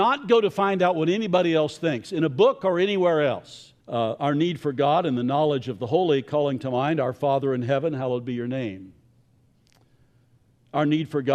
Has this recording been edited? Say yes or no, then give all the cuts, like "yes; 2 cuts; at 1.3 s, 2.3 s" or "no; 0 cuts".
yes; 1 cut; at 3.8 s